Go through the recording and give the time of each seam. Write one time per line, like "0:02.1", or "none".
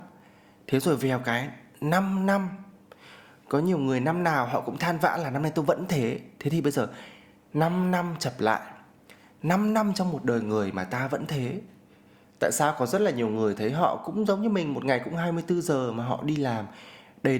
none

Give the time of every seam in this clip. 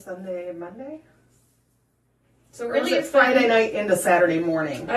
none

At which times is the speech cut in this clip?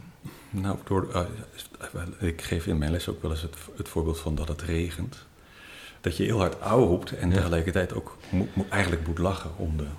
0:06.0

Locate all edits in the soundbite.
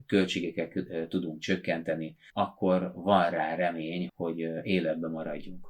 0:02.3
0:04.1

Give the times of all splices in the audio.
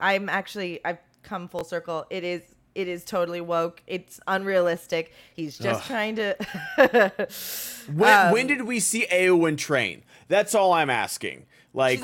none

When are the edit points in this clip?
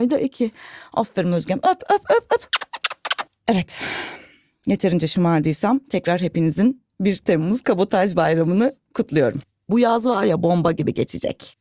0:09.7

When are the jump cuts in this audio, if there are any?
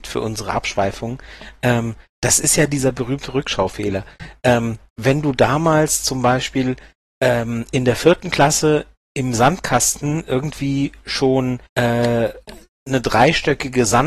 0:11.7

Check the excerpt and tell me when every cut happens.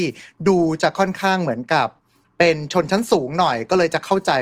none

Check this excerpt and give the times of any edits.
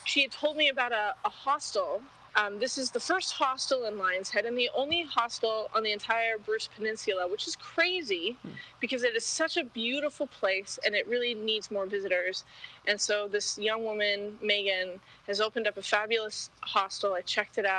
0:02.3

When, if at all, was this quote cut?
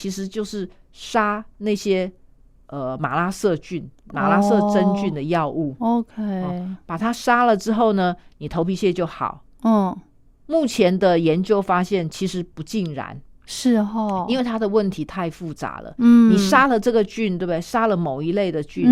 none

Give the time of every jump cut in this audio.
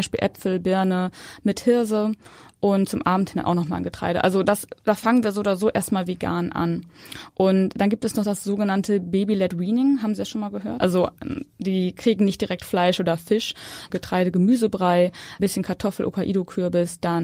0:10.8
0:13.9
0:15.4

